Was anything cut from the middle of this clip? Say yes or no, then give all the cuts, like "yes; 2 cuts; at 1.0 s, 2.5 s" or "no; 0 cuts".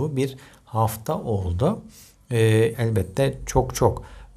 yes; 1 cut; at 2.7 s